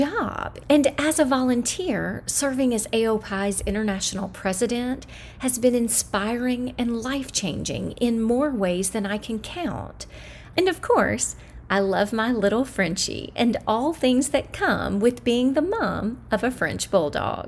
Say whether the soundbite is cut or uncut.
cut